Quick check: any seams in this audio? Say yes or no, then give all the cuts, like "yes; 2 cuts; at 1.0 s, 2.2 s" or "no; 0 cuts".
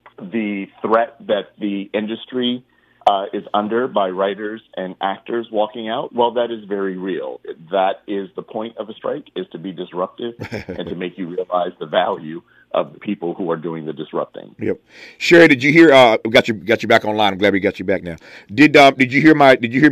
no; 0 cuts